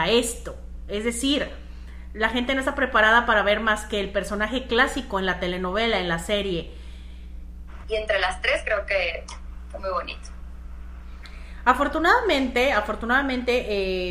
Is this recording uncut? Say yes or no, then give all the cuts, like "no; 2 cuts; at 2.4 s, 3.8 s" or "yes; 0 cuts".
no; 1 cut; at 7.8 s